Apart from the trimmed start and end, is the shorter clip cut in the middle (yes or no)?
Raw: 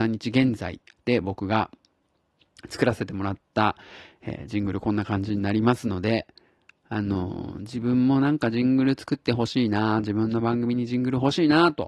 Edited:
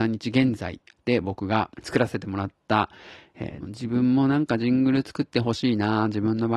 yes